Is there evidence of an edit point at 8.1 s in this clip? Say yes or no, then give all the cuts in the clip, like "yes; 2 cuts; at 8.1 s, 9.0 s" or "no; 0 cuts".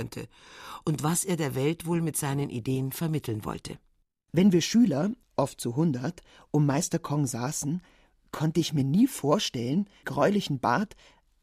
no; 1 cut; at 10.0 s